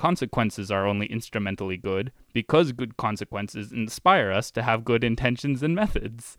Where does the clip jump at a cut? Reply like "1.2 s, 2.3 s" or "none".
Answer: none